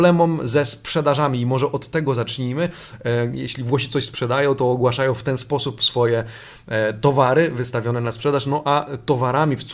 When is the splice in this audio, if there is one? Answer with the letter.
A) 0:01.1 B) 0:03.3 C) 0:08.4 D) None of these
B